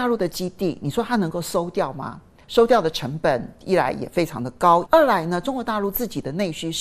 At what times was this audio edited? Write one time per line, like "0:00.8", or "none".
0:02.4
0:04.9